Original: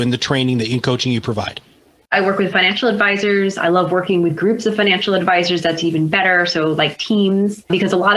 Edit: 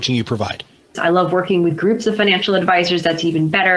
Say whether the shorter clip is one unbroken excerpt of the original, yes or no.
no